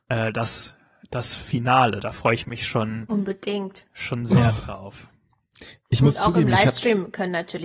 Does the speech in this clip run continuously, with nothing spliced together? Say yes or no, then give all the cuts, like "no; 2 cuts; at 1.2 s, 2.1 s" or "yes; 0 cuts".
yes; 0 cuts